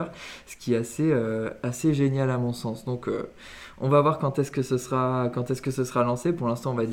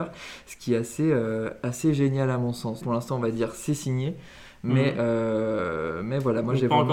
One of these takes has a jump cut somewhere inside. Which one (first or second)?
second